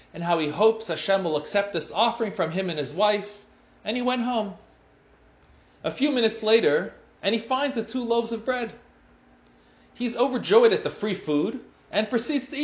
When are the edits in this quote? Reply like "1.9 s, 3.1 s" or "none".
7.2 s